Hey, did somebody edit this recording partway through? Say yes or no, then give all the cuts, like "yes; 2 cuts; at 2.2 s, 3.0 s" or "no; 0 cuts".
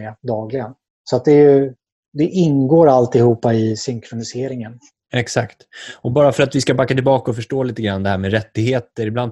yes; 1 cut; at 5.1 s